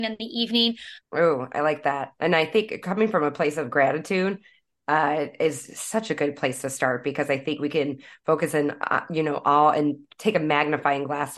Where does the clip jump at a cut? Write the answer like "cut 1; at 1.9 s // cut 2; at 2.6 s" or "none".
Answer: cut 1; at 1.0 s